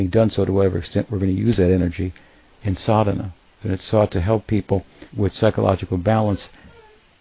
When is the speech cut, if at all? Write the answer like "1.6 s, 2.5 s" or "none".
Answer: 3.6 s, 5.1 s

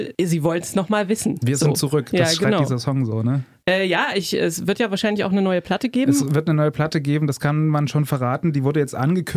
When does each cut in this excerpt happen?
none

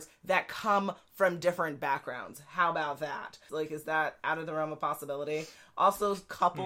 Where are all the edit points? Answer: 3.5 s

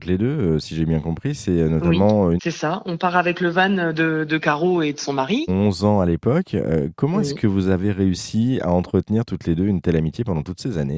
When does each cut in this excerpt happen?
2.4 s, 5.5 s

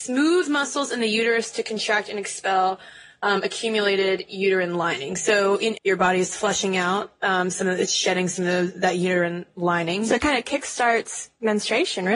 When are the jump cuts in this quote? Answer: 5.8 s

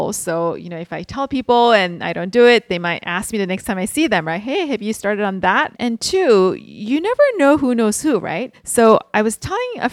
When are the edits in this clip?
5.7 s, 8.5 s

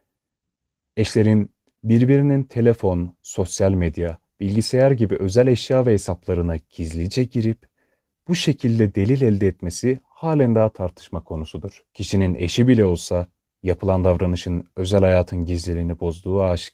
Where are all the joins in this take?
11.9 s

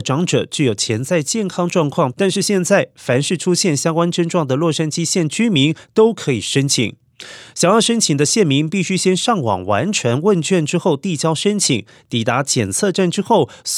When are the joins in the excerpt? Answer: 2.1 s

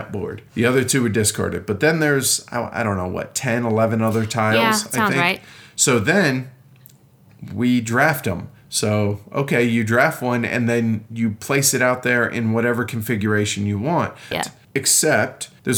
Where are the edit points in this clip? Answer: 14.3 s

